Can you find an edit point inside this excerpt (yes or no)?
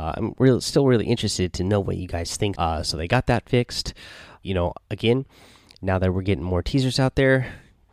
yes